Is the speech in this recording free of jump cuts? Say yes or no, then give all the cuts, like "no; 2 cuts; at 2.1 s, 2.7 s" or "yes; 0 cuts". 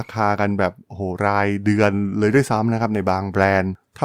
yes; 0 cuts